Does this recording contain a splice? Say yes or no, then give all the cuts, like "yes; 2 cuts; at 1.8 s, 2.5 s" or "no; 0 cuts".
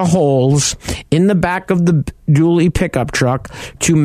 no; 0 cuts